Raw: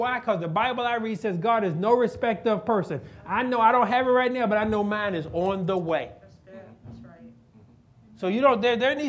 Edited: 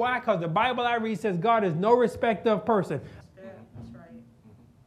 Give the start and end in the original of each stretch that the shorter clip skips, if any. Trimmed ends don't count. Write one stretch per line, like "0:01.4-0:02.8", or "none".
0:03.2-0:06.3